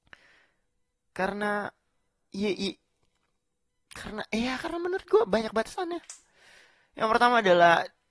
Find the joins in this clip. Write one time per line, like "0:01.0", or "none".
none